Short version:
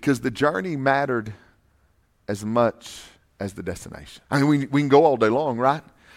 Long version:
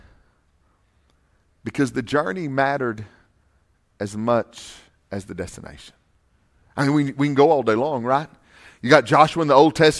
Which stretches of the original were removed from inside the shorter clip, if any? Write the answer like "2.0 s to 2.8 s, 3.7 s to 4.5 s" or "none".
6.0 s to 6.7 s